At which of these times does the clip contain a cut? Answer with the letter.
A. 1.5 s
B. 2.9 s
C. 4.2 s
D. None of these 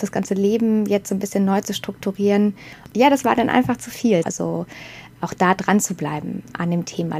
C